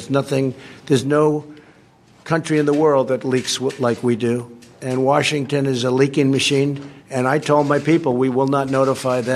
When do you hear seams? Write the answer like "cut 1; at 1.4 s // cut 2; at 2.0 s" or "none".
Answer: cut 1; at 7.0 s